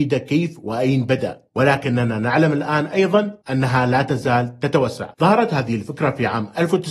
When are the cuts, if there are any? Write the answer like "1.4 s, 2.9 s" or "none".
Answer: 5.1 s